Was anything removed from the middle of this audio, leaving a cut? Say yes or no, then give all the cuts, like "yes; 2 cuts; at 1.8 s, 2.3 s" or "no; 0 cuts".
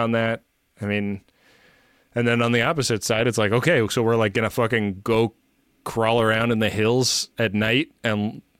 no; 0 cuts